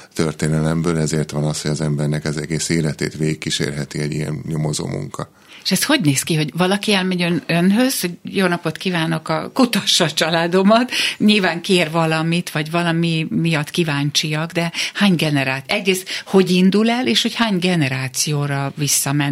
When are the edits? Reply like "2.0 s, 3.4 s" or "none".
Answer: none